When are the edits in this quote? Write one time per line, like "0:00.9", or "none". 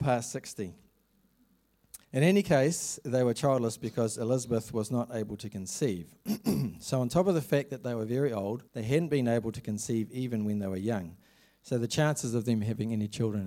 0:02.0
0:08.7

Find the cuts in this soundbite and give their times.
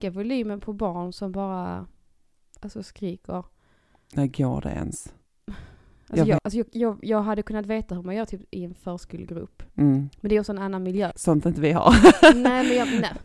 0:06.4
0:11.1

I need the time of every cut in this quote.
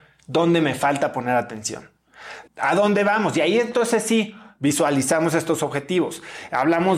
0:02.5

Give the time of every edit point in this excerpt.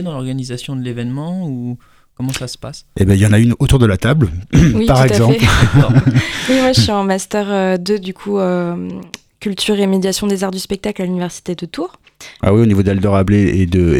0:12.4

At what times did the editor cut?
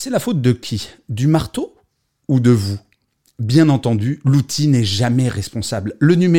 none

